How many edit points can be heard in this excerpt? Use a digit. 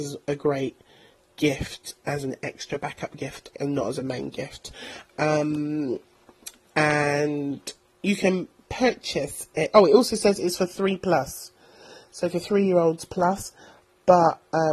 1